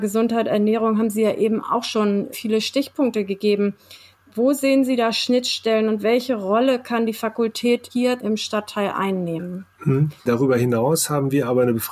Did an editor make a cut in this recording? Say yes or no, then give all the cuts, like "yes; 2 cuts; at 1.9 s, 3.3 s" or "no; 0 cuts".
yes; 1 cut; at 10.2 s